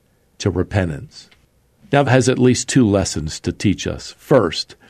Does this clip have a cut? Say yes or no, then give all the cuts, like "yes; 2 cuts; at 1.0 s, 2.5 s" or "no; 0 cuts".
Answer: yes; 1 cut; at 2.0 s